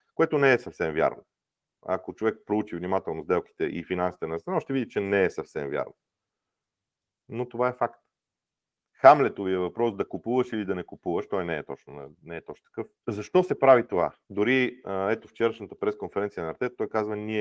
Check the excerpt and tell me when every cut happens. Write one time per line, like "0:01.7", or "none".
0:08.8
0:12.9
0:14.2

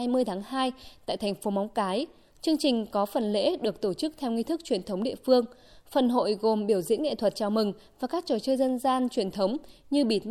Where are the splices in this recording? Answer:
none

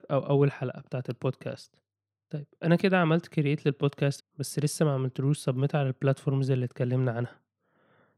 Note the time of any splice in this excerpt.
0:04.2

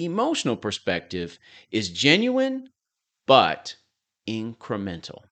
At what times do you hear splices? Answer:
none

